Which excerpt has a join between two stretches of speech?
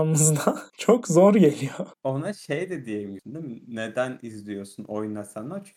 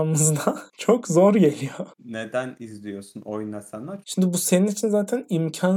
second; 2 cuts; at 2.0 s, 4.0 s

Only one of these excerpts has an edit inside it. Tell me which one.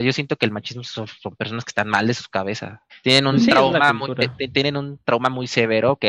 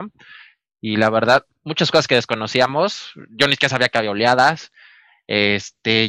first; 1 cut; at 2.9 s

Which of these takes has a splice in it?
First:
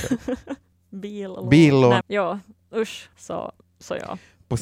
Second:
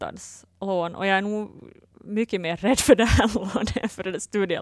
first; 2 cuts; at 2.0 s, 3.1 s

